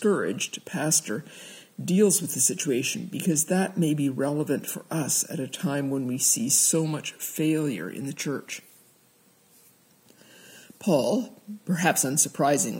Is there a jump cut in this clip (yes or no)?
no